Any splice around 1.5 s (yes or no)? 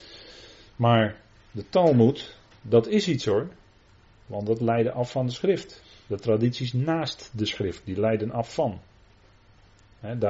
no